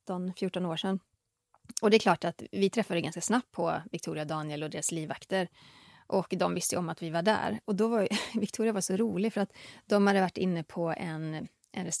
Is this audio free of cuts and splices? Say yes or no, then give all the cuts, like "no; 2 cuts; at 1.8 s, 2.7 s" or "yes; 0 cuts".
yes; 0 cuts